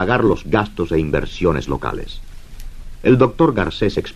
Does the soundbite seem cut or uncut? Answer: uncut